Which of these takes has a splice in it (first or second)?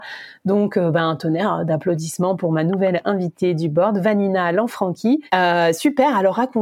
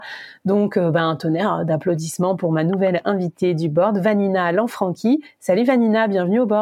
first